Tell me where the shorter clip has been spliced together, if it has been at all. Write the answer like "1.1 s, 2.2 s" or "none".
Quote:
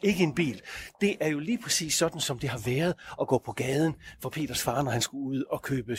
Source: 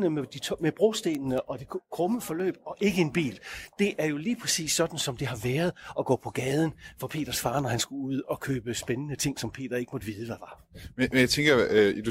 none